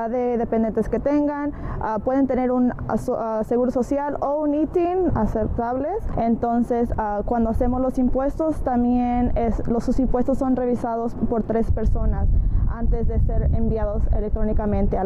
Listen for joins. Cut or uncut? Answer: cut